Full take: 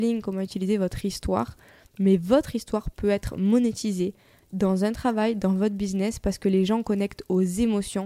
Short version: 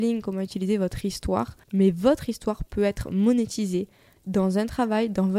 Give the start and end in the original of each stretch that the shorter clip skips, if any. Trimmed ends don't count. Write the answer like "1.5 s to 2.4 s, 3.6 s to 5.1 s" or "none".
1.6 s to 1.9 s

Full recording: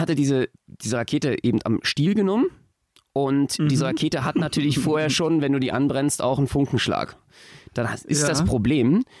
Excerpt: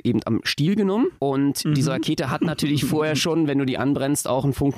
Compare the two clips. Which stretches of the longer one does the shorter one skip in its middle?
2.5 s to 3.1 s

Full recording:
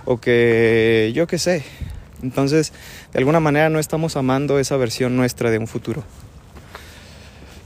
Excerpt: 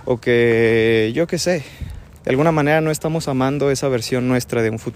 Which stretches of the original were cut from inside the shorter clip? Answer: 2.2 s to 3.1 s

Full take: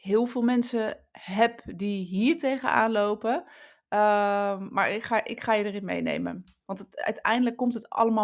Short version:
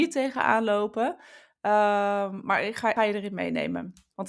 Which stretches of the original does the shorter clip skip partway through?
5.2 s to 5.5 s

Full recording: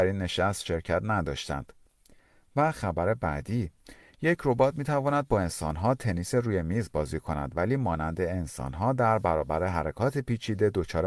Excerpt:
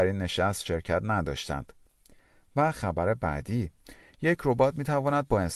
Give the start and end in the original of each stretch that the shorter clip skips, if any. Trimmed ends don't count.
none

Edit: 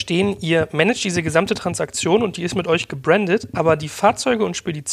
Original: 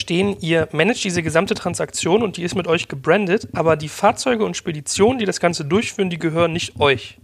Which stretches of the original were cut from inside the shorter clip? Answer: none

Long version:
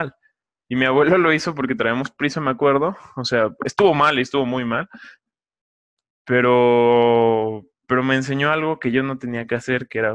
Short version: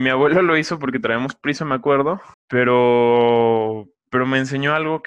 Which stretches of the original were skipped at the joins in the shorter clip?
3.1 s to 6.1 s

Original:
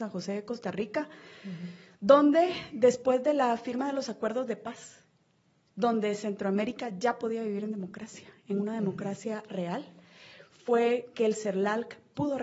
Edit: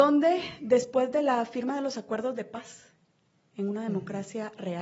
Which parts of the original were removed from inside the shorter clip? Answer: 5.6 s to 8.4 s

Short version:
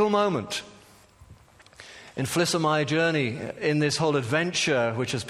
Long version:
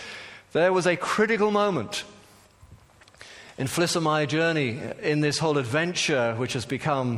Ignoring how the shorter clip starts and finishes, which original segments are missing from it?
none

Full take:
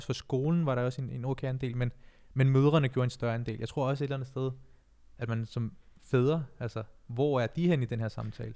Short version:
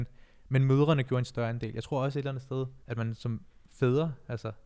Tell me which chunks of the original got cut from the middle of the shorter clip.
4.7 s to 5.1 s

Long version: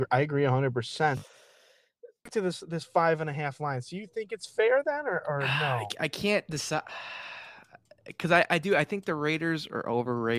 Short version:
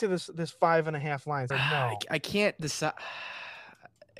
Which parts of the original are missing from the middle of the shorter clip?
3.8 s to 5.4 s

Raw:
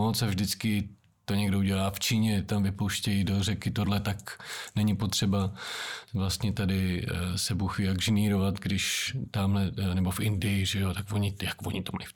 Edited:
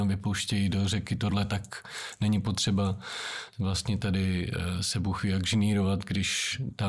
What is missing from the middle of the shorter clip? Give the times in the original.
none

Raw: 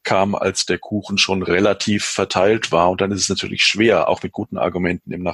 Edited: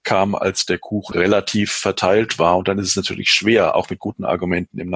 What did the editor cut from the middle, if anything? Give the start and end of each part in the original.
1.1 s to 1.4 s

